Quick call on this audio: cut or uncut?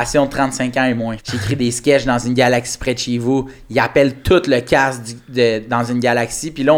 cut